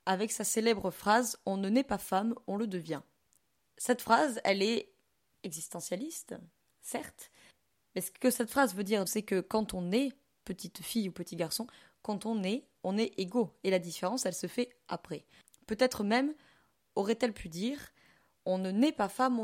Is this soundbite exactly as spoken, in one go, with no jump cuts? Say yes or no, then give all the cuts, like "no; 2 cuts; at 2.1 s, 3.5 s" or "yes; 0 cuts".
no; 1 cut; at 9.1 s